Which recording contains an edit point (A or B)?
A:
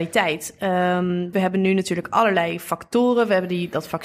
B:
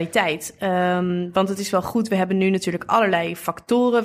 A